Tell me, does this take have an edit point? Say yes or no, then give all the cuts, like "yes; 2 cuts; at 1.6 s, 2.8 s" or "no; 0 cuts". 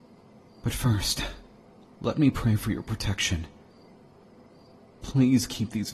no; 0 cuts